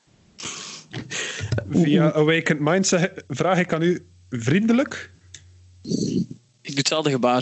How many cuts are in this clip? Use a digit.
0